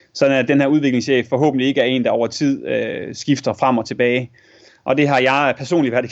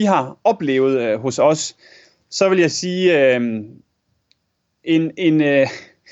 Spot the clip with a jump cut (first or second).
first